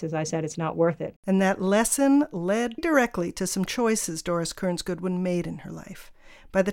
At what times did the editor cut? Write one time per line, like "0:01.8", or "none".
0:01.2
0:02.8

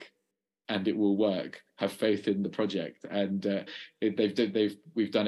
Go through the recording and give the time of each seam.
0:03.7

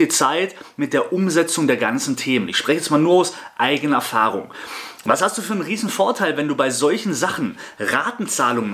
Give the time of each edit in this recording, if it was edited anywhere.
none

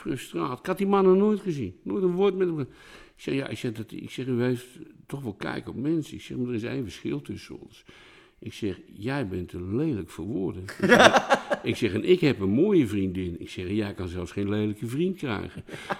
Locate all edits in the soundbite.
none

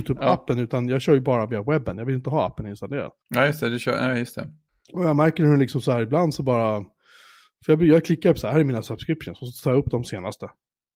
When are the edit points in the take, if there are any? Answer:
none

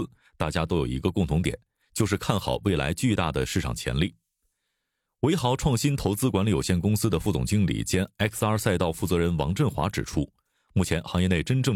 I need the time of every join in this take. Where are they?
none

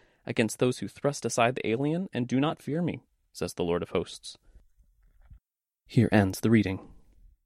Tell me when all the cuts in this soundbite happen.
none

